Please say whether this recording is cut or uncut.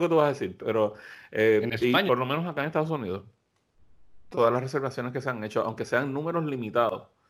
cut